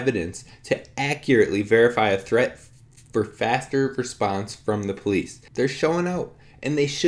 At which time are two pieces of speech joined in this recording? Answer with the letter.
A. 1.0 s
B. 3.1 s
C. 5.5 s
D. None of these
C